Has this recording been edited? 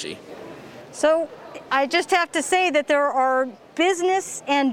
yes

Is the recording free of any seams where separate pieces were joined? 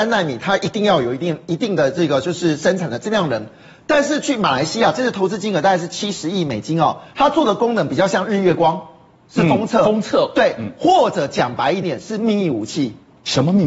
no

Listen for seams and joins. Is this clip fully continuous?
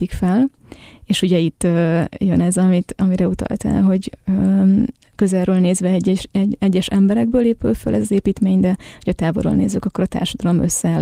yes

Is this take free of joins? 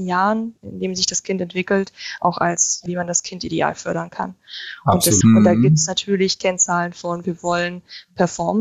no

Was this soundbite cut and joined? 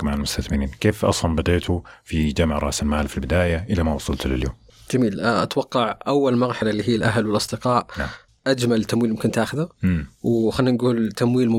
no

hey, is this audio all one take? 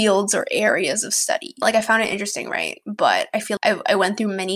no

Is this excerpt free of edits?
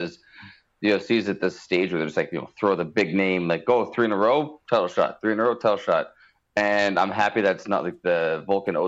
yes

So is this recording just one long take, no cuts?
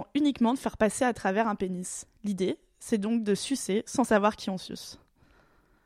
yes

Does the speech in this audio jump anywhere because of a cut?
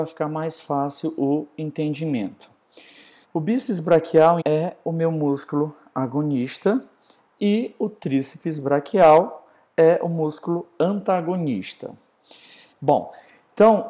yes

